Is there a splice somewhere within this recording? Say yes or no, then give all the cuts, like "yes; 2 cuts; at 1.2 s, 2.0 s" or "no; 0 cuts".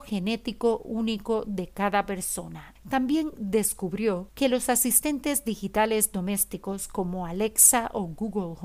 no; 0 cuts